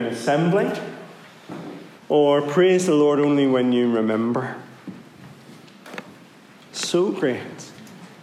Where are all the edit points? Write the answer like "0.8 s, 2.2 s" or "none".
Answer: 2.0 s, 6.5 s